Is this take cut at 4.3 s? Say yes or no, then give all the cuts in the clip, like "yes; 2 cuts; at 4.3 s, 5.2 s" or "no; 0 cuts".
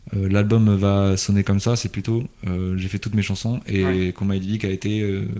no; 0 cuts